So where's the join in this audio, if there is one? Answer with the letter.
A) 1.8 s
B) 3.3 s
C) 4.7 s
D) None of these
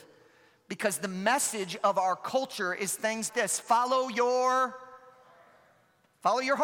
B